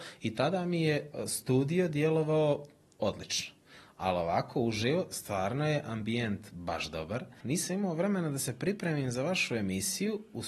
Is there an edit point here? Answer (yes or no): yes